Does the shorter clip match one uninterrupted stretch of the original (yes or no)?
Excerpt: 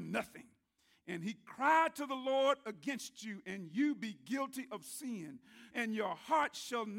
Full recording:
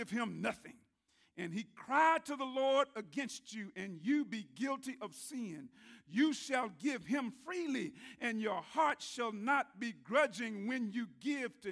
no